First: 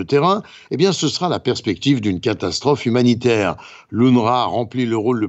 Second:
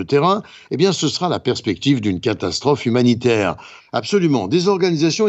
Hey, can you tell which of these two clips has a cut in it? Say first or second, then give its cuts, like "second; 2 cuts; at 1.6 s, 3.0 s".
second; 1 cut; at 3.8 s